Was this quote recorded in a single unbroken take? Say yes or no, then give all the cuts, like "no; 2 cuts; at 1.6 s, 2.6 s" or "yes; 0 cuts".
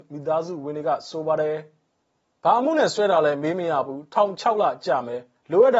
yes; 0 cuts